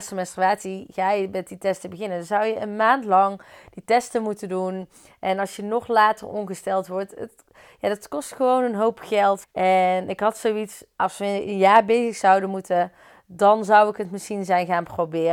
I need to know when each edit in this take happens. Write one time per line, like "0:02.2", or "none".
0:09.4
0:11.0

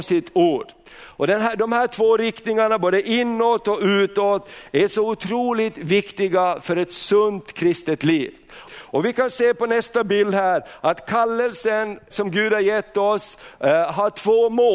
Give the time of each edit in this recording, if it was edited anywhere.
0:08.7
0:12.1

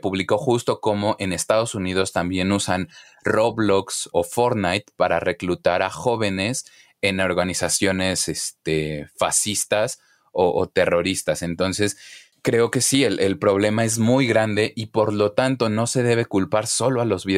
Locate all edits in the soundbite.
0:04.1

